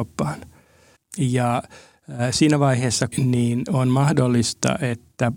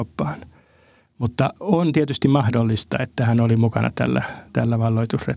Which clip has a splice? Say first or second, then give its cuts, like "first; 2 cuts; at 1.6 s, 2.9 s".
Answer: first; 2 cuts; at 1.0 s, 3.1 s